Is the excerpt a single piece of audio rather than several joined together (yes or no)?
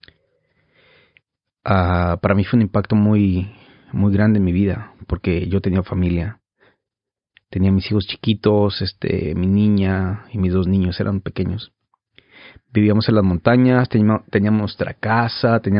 yes